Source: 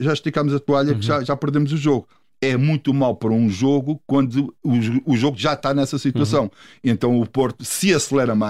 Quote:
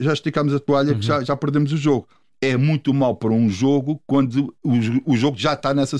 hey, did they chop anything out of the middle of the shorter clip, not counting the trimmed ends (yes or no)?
no